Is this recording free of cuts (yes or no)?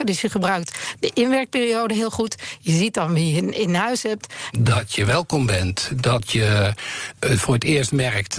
no